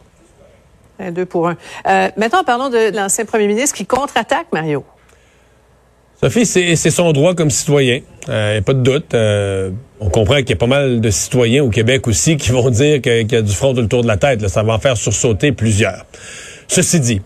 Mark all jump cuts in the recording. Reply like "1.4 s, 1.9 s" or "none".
2.9 s, 10.0 s